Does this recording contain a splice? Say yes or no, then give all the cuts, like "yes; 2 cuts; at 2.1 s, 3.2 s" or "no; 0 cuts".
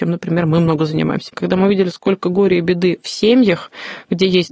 yes; 1 cut; at 1.3 s